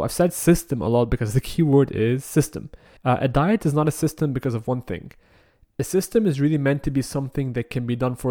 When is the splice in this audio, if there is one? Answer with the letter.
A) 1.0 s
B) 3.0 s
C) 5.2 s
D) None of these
B